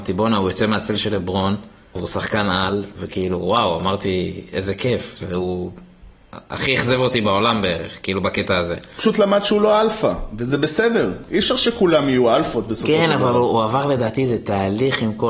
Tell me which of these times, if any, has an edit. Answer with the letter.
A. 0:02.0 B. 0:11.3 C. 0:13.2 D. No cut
A